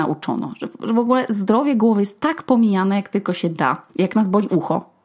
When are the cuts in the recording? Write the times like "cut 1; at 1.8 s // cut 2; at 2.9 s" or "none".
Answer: cut 1; at 3.9 s